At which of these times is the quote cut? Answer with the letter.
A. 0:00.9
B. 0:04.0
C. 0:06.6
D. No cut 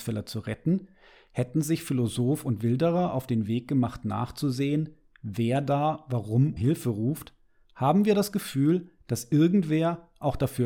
C